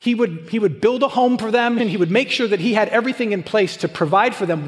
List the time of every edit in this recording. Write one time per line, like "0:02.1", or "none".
0:01.8